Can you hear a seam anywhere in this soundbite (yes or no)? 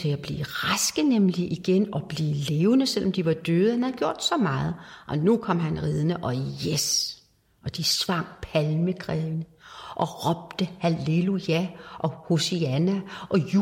no